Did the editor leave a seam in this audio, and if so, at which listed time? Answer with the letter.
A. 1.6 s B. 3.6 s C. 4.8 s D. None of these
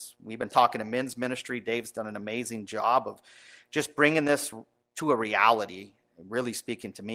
C